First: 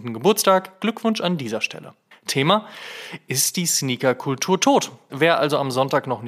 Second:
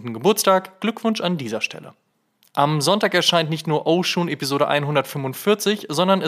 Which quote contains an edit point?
first; 2 cuts; at 2.1 s, 5.1 s

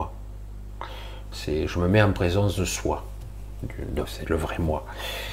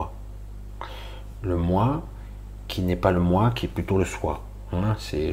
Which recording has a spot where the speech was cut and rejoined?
first; 2 cuts; at 1.3 s, 4.0 s

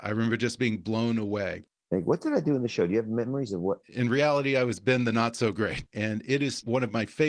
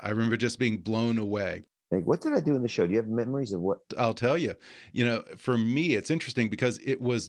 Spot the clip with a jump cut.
first; 2 cuts; at 3.8 s, 5.9 s

